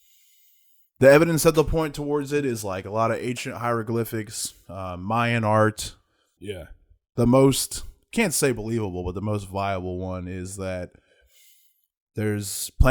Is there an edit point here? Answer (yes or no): yes